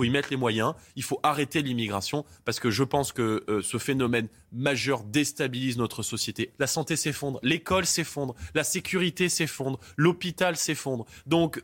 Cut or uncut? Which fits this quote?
cut